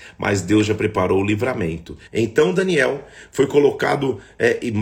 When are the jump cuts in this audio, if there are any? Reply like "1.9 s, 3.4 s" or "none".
2.1 s